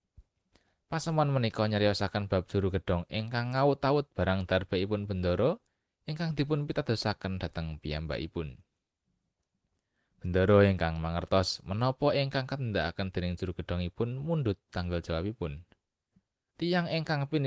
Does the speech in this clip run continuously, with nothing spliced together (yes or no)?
no